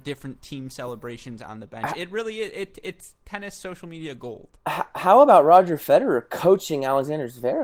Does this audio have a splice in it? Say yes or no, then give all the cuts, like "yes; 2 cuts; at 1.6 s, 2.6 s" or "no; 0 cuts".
no; 0 cuts